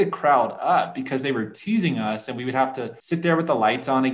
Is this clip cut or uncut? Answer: uncut